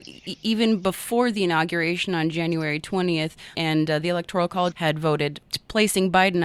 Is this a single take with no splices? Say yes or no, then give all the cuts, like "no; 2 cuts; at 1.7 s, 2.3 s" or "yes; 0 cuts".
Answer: no; 2 cuts; at 3.5 s, 4.7 s